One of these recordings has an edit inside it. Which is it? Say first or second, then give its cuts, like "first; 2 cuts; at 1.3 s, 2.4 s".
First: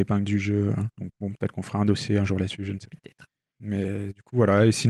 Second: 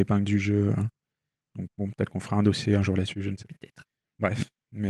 first; 2 cuts; at 0.9 s, 3.5 s